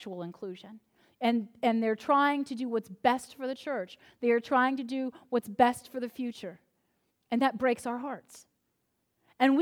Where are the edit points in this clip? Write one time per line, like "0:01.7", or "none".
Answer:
0:07.1